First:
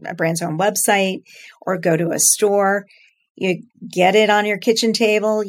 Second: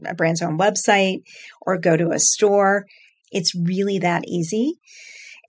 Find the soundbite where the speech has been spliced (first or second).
second